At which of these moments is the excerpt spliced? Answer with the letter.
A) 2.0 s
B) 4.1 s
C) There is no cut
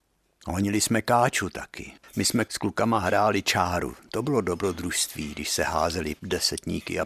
A